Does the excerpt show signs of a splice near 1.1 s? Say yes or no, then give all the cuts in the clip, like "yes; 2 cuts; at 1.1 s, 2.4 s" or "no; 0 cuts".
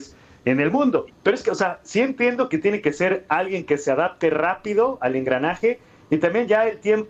yes; 1 cut; at 1.1 s